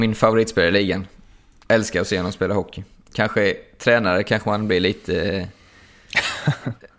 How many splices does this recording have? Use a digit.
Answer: 0